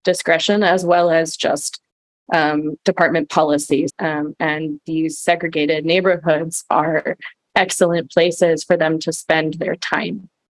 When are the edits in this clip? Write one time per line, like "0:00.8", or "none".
0:03.9